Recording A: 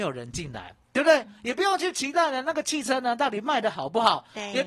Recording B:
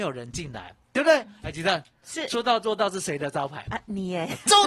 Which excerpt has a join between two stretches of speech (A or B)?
B